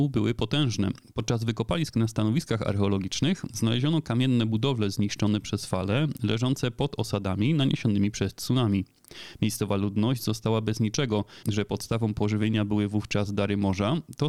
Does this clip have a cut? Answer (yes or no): yes